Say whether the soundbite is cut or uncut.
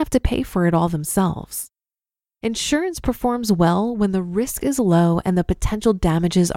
uncut